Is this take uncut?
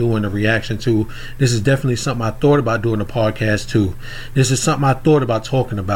yes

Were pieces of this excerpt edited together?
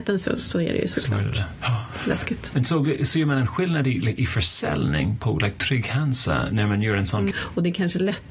yes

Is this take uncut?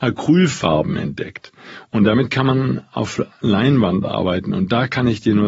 yes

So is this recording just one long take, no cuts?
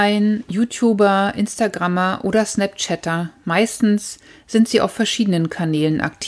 yes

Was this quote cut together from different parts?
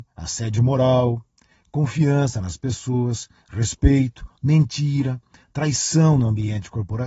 no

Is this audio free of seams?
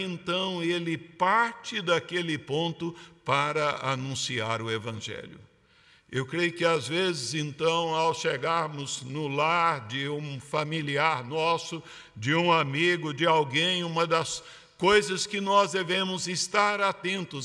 yes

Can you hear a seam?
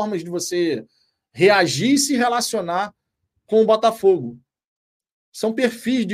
no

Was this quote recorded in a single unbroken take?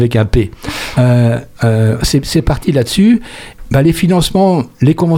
yes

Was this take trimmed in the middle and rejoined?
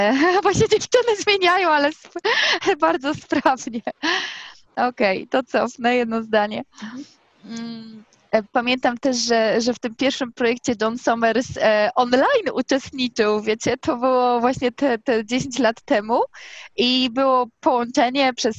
no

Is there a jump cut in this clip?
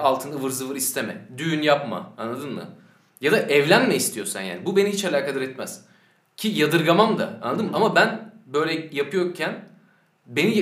no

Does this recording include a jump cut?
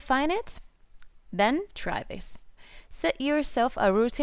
no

